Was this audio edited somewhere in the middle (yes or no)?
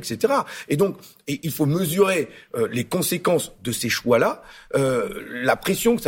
no